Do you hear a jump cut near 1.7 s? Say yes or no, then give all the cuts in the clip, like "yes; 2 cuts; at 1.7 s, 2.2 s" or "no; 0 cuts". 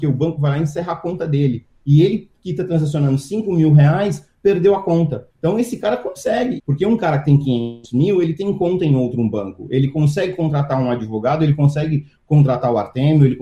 no; 2 cuts; at 5.3 s, 6.6 s